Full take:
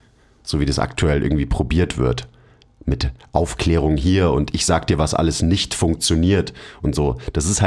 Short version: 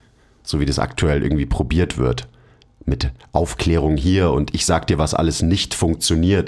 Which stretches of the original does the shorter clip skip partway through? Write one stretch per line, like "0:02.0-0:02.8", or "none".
none